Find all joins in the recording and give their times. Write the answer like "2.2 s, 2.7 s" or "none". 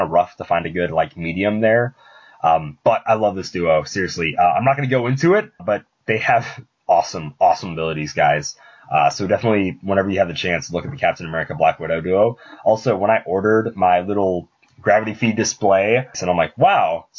5.6 s, 16.1 s

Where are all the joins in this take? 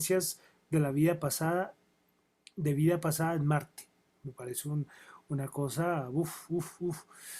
none

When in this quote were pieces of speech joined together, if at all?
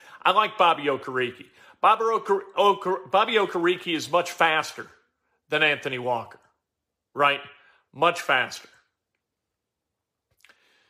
none

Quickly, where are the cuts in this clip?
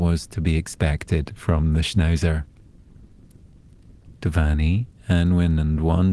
4.1 s

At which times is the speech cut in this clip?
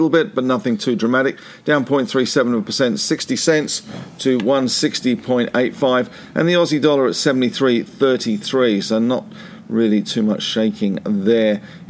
none

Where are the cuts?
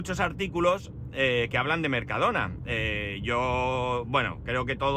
none

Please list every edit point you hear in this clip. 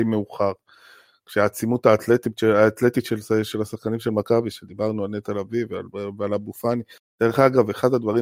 none

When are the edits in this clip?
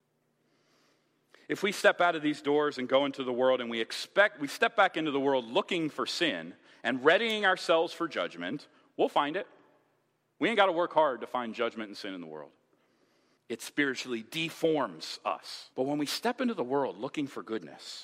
13.4 s, 15.7 s

